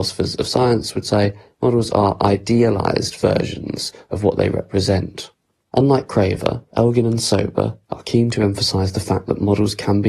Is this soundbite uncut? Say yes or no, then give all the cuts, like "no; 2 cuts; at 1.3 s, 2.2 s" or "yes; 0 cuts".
no; 2 cuts; at 5.6 s, 6.7 s